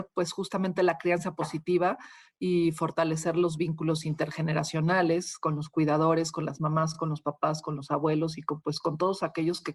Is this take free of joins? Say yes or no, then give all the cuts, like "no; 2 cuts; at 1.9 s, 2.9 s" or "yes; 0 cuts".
yes; 0 cuts